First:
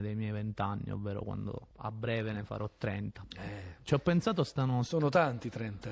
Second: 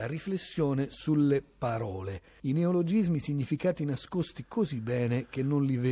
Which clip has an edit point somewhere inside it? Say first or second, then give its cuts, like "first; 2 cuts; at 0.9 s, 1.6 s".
second; 1 cut; at 3.2 s